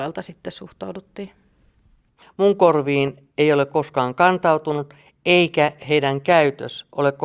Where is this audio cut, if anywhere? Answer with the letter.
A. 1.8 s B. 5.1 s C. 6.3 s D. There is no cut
D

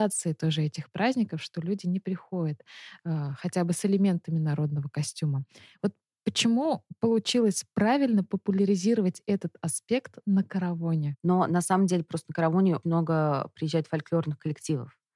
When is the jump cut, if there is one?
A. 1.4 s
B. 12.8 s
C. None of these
B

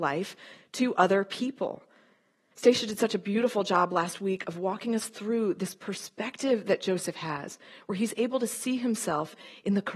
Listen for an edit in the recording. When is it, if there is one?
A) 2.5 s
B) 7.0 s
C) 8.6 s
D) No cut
A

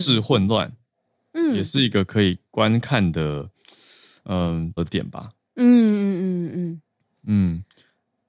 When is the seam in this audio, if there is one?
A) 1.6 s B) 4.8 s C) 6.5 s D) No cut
B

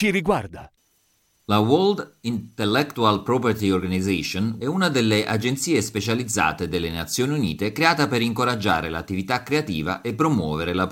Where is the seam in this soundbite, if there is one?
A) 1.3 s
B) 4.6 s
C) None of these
B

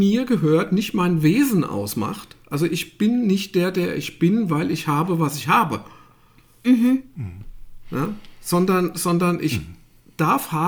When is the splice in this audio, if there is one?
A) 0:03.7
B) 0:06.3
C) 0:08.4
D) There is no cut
D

